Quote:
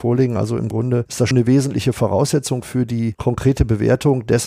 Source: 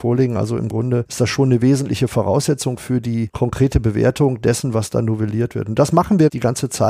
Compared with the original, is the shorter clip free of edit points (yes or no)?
no